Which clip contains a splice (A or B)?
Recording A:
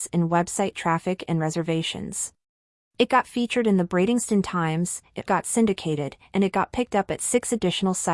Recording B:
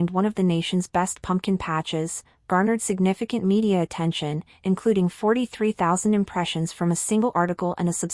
A